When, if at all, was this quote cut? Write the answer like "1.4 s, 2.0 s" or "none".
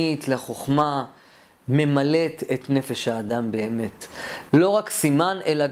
4.5 s